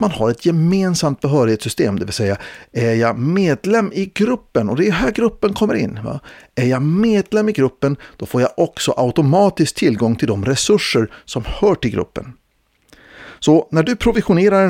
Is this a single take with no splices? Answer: yes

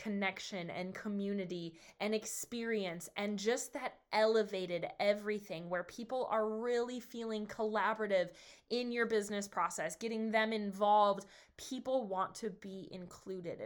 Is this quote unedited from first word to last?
yes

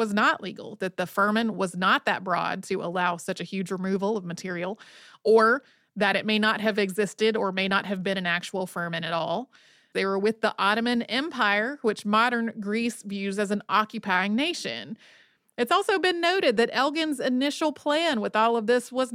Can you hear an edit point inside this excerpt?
yes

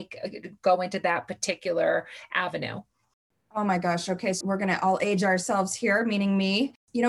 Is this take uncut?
no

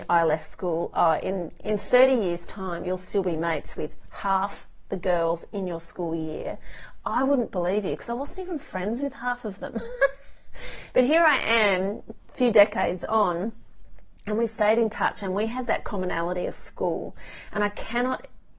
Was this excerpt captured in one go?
yes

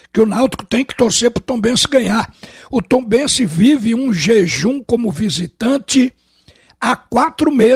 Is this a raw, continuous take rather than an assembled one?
yes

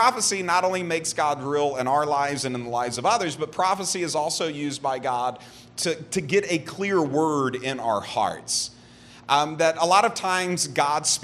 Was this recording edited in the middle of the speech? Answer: no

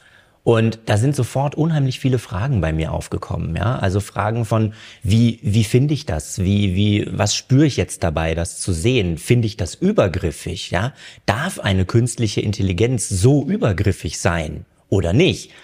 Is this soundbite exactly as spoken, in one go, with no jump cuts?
yes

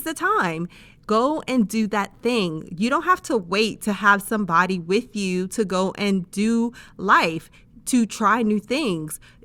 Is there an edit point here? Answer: no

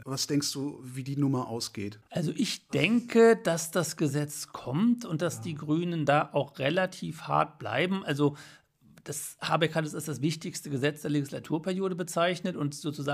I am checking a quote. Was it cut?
no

